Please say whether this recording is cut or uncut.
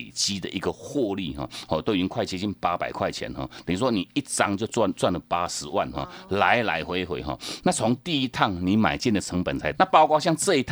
cut